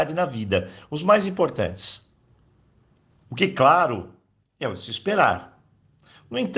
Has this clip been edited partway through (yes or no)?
yes